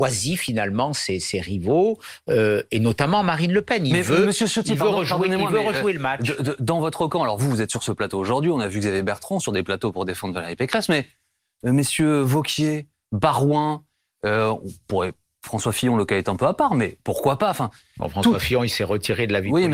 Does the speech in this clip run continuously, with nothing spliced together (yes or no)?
yes